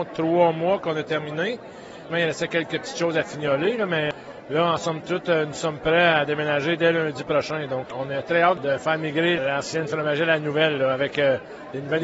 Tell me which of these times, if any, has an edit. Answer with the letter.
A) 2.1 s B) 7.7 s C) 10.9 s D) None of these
A